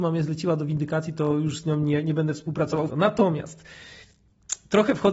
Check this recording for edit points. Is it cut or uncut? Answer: cut